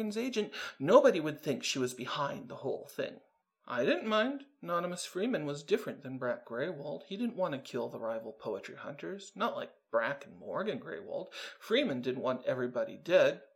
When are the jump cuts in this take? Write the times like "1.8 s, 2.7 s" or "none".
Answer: none